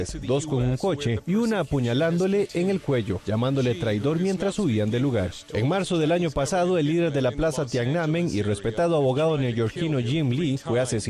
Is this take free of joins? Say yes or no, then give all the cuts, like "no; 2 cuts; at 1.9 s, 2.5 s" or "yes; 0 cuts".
yes; 0 cuts